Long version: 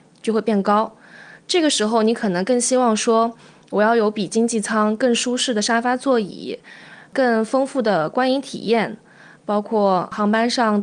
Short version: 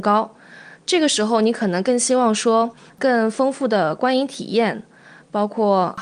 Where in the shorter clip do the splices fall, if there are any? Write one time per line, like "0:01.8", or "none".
0:02.9

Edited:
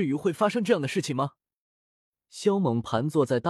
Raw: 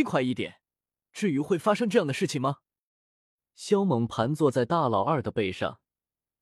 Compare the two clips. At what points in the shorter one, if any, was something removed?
none

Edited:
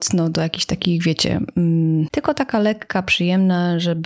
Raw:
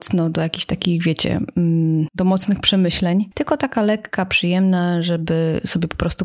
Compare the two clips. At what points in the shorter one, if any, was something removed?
0:02.1

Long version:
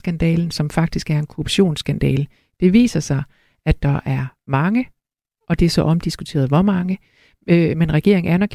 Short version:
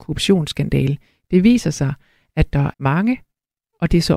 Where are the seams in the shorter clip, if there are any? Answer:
0:02.7

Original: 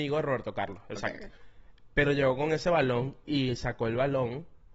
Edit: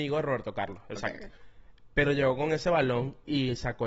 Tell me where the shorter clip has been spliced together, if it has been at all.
none

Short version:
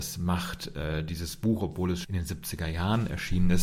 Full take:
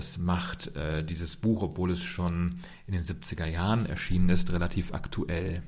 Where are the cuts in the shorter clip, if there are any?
0:02.0

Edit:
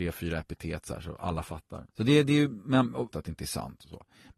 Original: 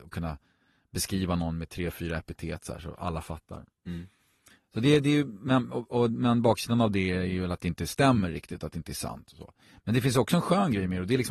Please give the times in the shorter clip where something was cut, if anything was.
0:01.9
0:03.1

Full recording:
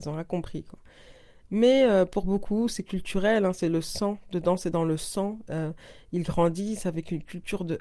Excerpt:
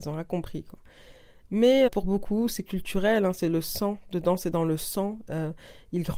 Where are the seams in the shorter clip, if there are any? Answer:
0:01.9

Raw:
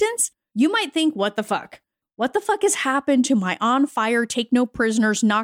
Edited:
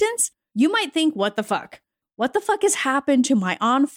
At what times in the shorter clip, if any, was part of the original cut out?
none

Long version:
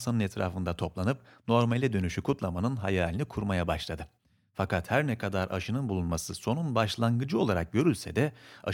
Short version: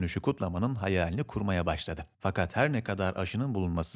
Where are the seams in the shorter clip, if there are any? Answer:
0:02.1

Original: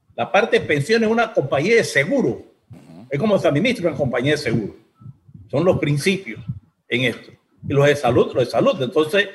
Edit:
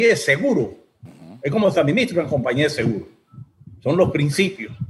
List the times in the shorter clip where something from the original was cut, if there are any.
none

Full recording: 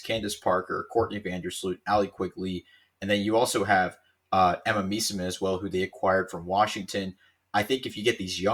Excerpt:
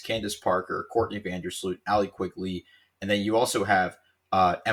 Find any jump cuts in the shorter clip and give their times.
none

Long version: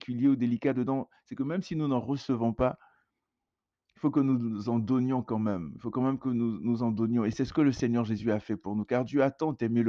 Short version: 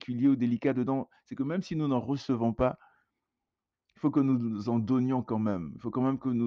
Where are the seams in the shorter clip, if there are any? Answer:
none

